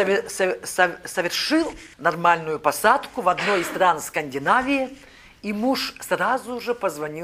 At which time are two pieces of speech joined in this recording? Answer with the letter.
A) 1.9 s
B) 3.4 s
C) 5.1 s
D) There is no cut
A